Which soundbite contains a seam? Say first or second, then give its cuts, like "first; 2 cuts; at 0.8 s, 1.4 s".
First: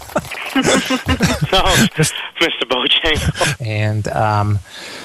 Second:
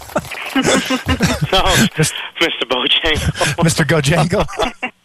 first; 1 cut; at 3.6 s